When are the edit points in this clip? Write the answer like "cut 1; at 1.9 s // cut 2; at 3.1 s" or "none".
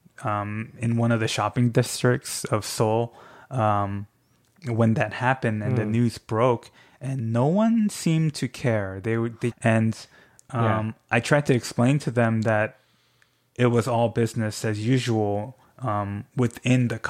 cut 1; at 9.5 s